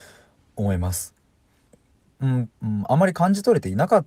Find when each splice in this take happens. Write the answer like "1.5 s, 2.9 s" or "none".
2.5 s